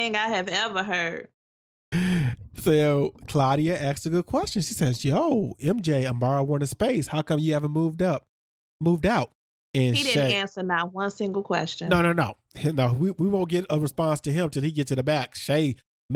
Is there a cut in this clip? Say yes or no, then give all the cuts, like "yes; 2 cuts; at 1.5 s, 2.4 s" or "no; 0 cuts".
no; 0 cuts